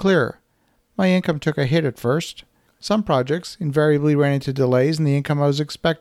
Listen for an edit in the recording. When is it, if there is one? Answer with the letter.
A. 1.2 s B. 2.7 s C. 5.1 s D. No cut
B